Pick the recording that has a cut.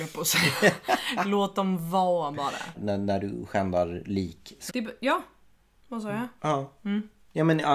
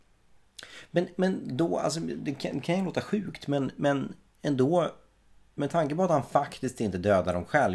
first; 3 cuts; at 2.7 s, 4.7 s, 6.4 s

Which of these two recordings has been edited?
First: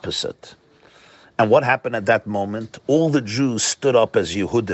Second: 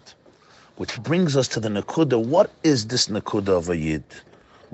second; 1 cut; at 1.0 s

